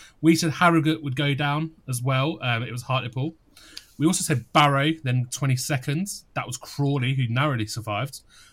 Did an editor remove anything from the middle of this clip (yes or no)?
no